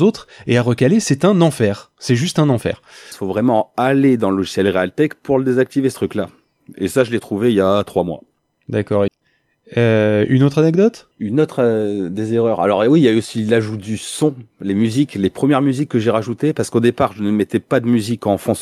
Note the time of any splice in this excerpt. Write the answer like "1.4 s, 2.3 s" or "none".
3.1 s, 9.1 s, 11.1 s